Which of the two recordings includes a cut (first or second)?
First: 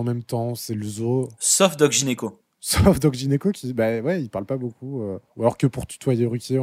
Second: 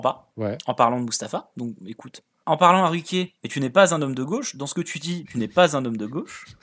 second